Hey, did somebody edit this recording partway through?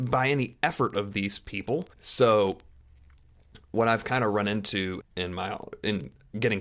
yes; 2 cuts; at 1.9 s, 5.0 s

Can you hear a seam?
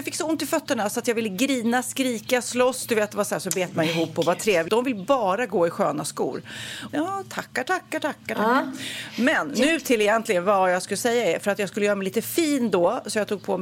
yes; 2 cuts; at 4.7 s, 6.9 s

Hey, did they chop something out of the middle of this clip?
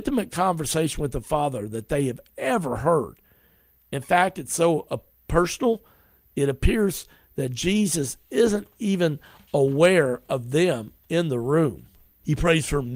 no; 0 cuts

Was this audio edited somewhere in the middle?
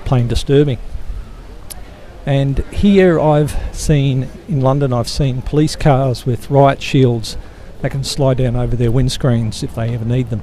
no; 0 cuts

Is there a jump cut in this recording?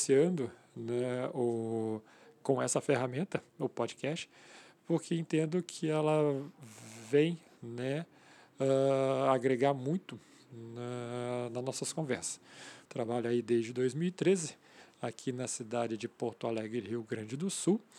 yes; 1 cut; at 12.9 s

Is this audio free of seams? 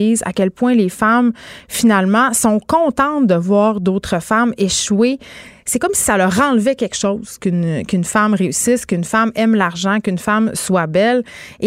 yes; 0 cuts

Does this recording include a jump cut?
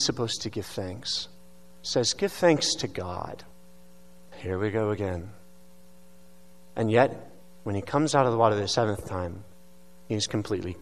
yes; 1 cut; at 4.3 s

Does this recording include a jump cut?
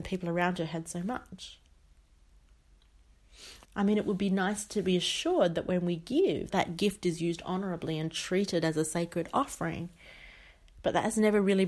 yes; 2 cuts; at 3.6 s, 6.5 s

